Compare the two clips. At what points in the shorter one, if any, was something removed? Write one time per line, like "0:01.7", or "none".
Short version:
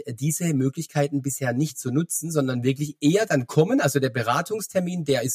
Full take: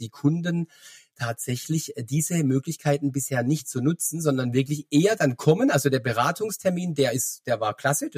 none

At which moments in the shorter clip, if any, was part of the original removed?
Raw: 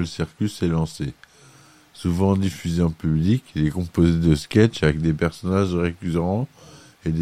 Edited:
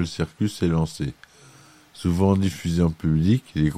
none

